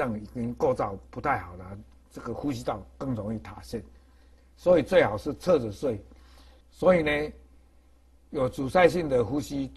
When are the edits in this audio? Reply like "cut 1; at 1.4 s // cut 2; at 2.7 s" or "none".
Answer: cut 1; at 6.6 s